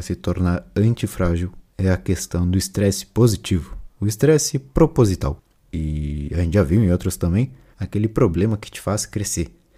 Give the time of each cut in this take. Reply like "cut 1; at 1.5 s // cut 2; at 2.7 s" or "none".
cut 1; at 5.5 s // cut 2; at 7.7 s